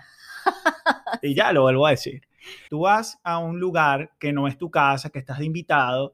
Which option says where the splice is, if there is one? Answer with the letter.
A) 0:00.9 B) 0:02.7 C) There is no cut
B